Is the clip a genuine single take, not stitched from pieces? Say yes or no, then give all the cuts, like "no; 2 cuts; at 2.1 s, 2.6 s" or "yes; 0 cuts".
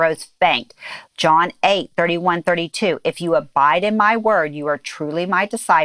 no; 1 cut; at 1.1 s